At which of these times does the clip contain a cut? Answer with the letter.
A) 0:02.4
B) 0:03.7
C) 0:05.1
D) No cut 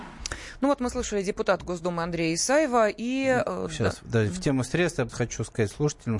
C